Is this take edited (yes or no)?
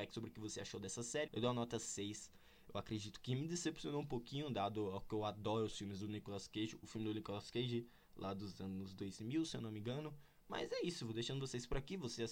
yes